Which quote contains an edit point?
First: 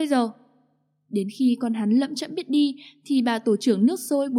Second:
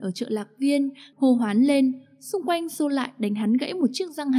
second; 1 cut; at 1.1 s

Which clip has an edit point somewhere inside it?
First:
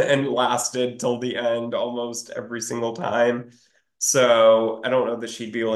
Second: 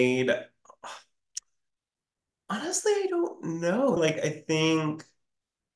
second; 1 cut; at 4.0 s

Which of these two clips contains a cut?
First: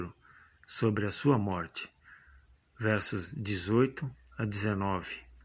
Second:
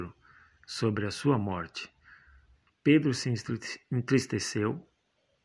second; 1 cut; at 2.7 s

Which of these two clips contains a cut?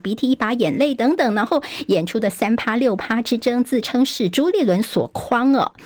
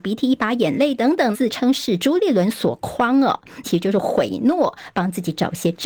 second; 2 cuts; at 1.3 s, 3.6 s

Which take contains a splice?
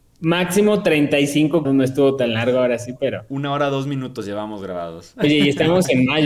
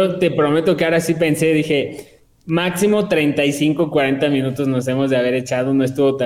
first; 1 cut; at 1.6 s

